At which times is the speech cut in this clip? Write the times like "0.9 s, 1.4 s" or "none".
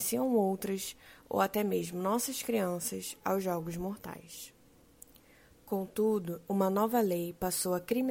6.4 s